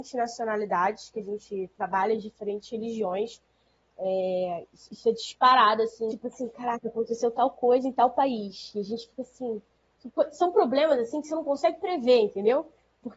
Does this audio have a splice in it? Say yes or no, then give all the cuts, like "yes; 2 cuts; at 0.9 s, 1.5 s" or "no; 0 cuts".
yes; 1 cut; at 6.1 s